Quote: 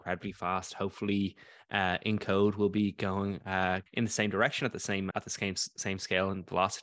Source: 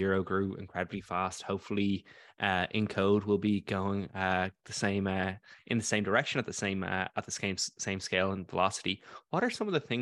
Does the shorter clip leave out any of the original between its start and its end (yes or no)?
yes